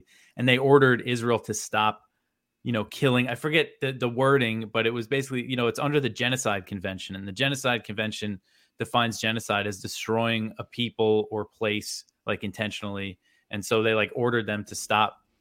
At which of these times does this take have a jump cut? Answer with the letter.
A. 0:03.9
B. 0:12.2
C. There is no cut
C